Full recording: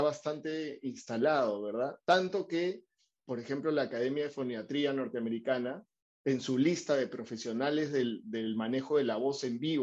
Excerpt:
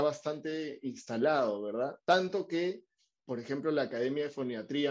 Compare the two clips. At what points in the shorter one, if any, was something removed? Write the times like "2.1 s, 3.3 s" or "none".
none